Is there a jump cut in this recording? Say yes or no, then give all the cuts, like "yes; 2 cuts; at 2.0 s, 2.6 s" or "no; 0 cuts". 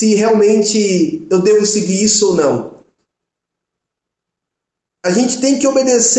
no; 0 cuts